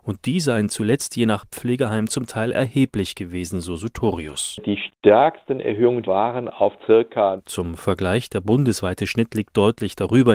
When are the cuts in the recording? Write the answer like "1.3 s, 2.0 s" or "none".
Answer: 6.0 s, 7.4 s